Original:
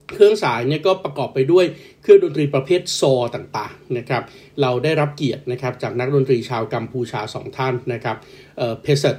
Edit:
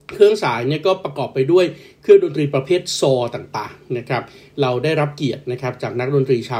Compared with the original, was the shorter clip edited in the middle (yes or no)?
no